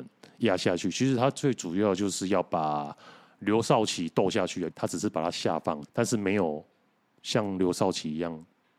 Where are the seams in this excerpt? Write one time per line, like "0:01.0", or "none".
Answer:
0:04.7
0:05.9